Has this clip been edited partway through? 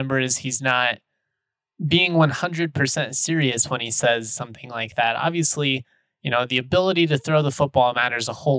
no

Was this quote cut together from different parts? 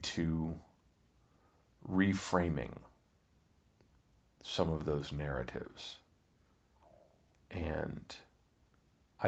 no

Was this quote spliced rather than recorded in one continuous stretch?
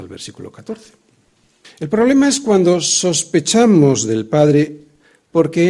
yes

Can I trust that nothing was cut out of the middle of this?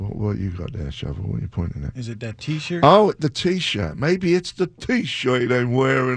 yes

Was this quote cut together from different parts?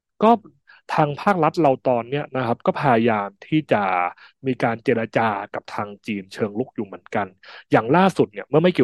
no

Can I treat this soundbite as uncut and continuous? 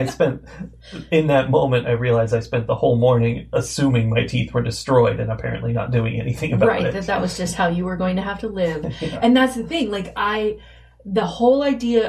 yes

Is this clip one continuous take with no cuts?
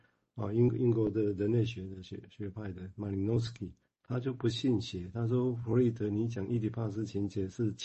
yes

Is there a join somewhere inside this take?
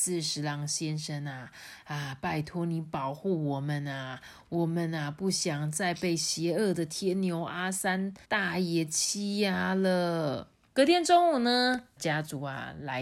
yes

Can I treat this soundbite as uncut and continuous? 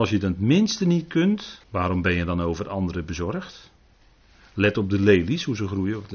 no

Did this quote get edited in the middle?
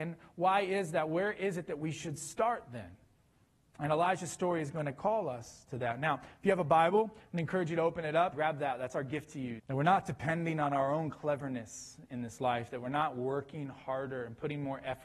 yes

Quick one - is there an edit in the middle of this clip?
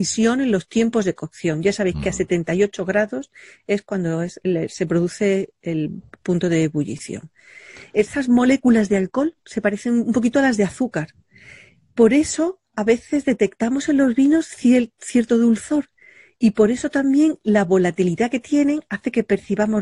no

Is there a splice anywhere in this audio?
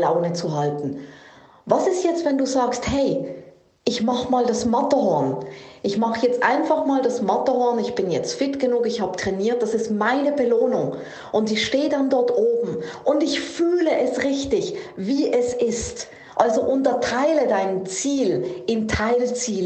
yes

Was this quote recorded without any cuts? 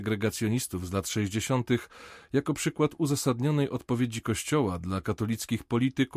yes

